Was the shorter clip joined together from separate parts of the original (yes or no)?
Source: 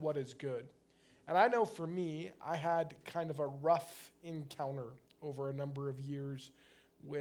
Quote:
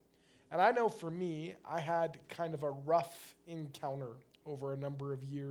no